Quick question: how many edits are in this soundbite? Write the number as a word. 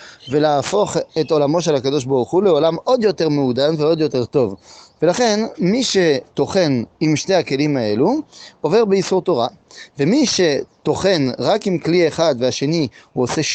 one